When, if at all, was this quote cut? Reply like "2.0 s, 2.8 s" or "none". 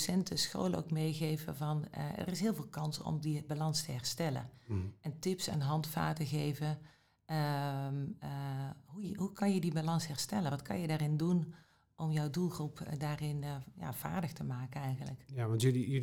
none

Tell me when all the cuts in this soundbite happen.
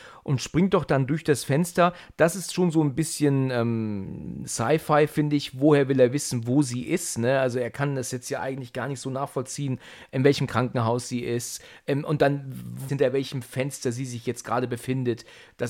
12.9 s

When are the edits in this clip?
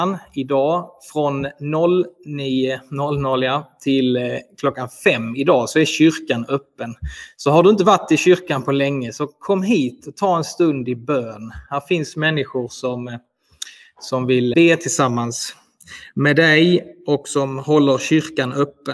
14.5 s

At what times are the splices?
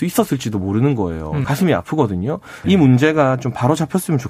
1.4 s, 2.6 s

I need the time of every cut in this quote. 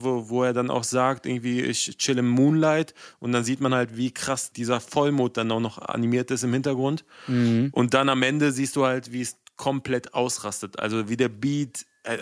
none

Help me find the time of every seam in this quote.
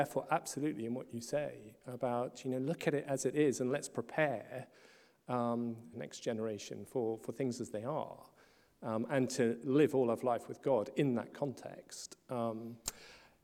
5.9 s

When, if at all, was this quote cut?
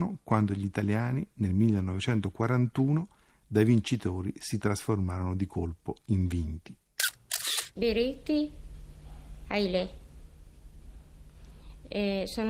none

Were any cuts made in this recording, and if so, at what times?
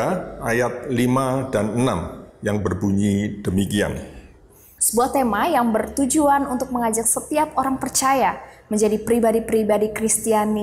4.8 s

